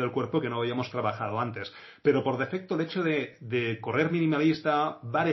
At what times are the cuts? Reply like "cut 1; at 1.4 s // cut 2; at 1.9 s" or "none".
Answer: none